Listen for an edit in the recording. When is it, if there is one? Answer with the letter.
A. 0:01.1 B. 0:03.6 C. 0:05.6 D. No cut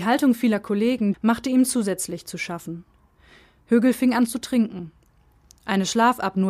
A